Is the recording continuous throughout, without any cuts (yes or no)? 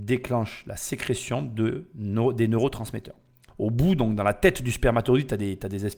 no